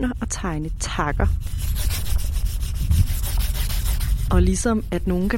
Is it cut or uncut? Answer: uncut